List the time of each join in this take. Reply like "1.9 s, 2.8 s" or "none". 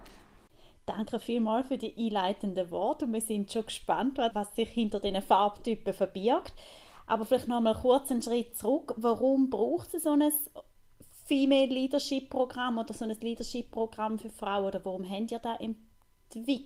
4.3 s